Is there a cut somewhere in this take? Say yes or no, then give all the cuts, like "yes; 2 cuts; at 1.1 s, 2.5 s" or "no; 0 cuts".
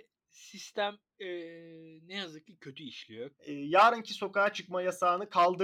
yes; 1 cut; at 3.4 s